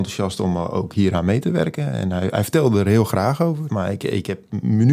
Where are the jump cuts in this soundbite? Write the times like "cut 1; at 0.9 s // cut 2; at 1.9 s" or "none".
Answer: cut 1; at 3.7 s